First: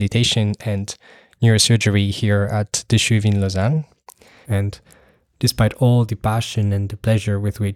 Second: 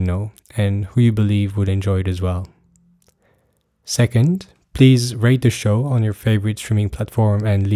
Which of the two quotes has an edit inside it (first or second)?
first